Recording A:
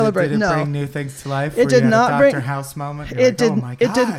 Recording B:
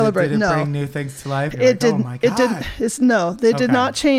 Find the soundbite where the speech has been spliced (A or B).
B